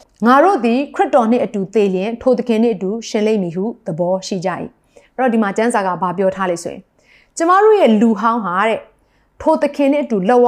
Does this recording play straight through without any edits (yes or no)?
yes